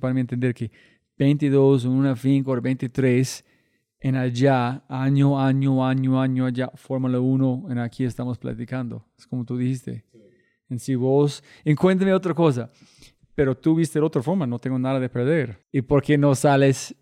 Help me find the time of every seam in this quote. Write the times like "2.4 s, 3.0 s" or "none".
13.2 s, 15.6 s

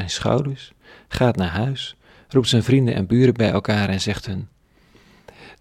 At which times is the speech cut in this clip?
none

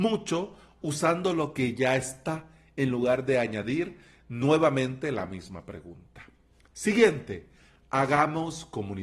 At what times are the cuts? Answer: none

